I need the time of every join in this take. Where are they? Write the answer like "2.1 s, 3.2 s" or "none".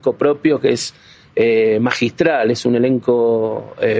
none